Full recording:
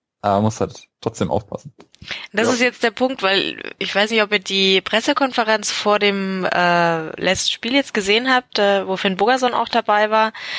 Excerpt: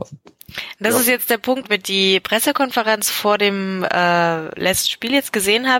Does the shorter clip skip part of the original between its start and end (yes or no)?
yes